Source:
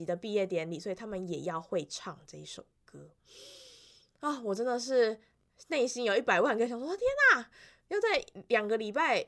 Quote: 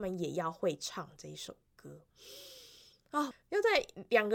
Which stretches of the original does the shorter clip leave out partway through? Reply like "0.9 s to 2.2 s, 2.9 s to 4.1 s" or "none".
4.4 s to 7.7 s